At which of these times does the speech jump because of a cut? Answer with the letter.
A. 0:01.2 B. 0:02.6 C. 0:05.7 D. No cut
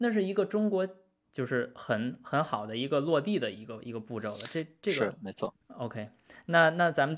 A